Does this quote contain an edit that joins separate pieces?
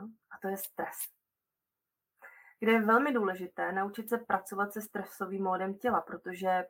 no; 0 cuts

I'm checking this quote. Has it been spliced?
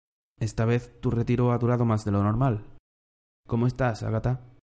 no; 0 cuts

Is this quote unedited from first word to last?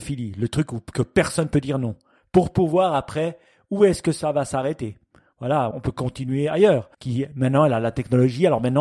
no; 2 cuts; at 5.7 s, 6.9 s

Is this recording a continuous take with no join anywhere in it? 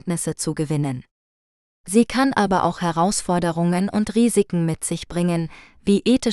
yes; 0 cuts

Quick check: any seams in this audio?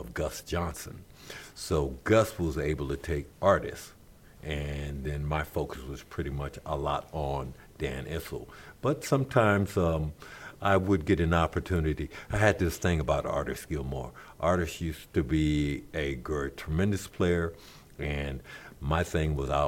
yes; 1 cut; at 3.3 s

